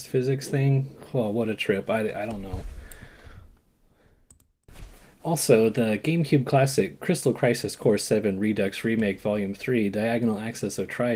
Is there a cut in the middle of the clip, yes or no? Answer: no